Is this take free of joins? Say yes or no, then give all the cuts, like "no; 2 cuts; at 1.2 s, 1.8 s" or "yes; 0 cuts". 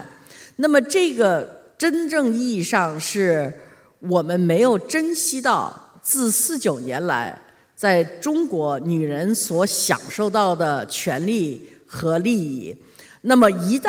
yes; 0 cuts